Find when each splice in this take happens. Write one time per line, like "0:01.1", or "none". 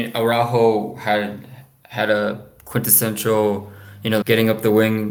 0:04.2